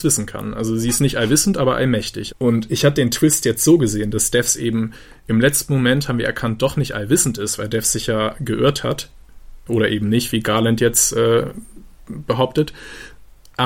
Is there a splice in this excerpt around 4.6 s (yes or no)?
no